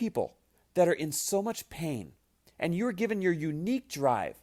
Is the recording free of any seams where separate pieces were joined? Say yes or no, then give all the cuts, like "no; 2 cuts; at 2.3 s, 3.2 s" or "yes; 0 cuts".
yes; 0 cuts